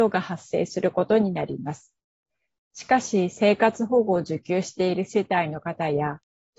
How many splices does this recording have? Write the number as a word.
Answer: one